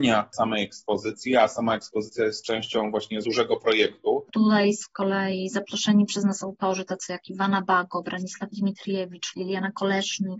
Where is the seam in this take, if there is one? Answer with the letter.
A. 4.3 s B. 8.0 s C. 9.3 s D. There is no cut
A